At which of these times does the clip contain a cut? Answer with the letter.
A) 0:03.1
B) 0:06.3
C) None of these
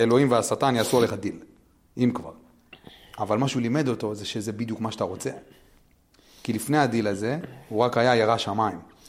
C